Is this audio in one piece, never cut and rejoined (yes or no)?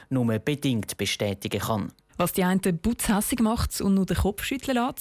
no